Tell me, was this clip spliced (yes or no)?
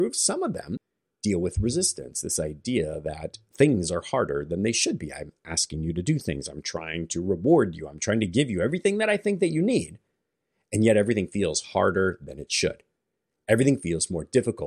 no